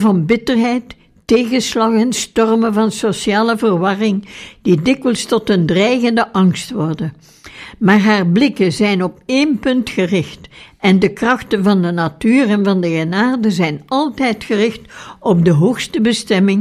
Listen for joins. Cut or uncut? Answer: uncut